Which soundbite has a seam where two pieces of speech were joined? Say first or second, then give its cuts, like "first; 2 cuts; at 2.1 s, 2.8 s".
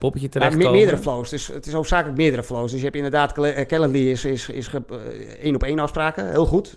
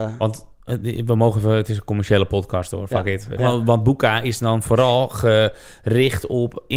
second; 1 cut; at 3.4 s